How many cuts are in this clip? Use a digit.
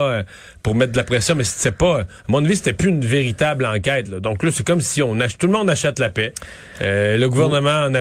0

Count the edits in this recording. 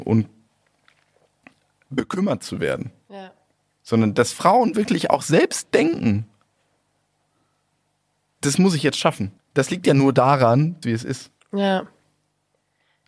2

